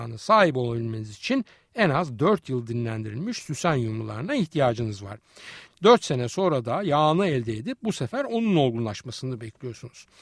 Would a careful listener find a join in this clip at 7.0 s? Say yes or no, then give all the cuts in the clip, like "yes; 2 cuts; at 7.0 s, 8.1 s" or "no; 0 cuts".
no; 1 cut; at 5.7 s